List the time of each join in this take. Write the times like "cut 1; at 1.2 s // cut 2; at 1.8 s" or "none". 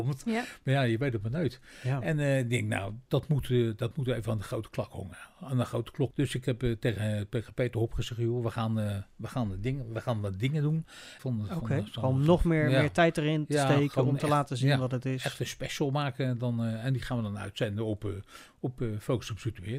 cut 1; at 3.1 s // cut 2; at 6.1 s // cut 3; at 11.2 s

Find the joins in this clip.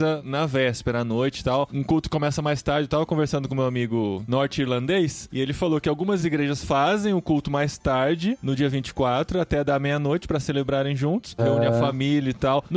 cut 1; at 11.4 s

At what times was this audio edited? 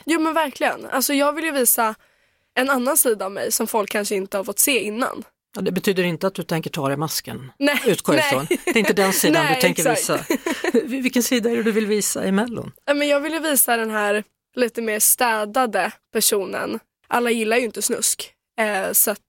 none

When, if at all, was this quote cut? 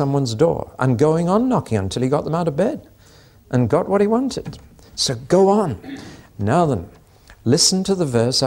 none

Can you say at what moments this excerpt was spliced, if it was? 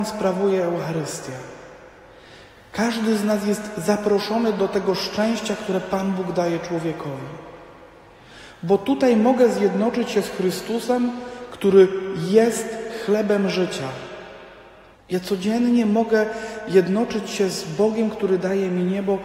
cut 1; at 11.5 s // cut 2; at 14.9 s

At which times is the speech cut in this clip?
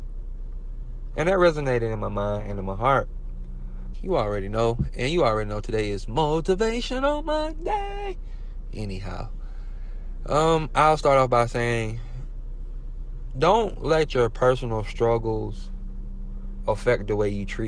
cut 1; at 3.9 s

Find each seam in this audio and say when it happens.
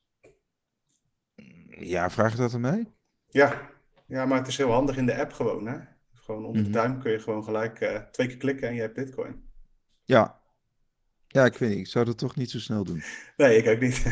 cut 1; at 4.1 s

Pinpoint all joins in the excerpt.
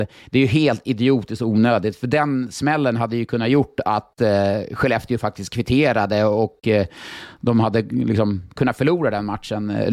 none

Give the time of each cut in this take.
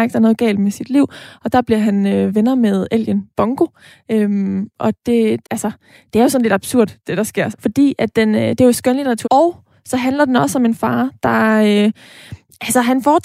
cut 1; at 5.4 s // cut 2; at 7.5 s // cut 3; at 9.2 s

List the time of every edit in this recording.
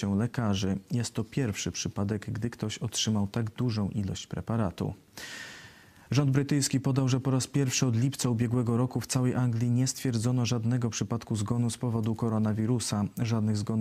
none

